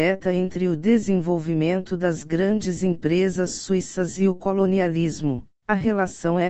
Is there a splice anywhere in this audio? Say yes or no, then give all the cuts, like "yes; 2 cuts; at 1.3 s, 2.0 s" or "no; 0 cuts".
yes; 1 cut; at 5.5 s